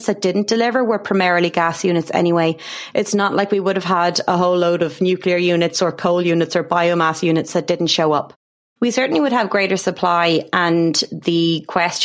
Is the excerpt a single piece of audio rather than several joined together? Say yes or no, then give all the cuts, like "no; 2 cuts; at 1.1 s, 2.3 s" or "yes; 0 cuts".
no; 1 cut; at 8.8 s